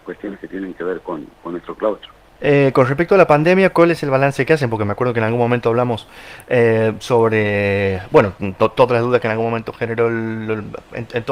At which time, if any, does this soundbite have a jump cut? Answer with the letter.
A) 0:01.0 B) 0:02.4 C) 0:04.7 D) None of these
B